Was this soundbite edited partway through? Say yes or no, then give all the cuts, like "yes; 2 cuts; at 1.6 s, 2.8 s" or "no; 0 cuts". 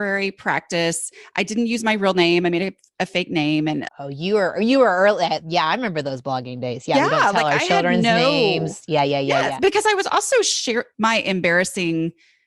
yes; 2 cuts; at 3.9 s, 10.9 s